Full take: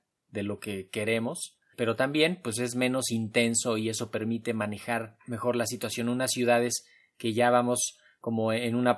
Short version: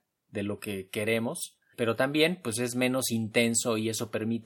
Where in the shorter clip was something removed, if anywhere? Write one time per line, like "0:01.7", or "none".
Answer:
none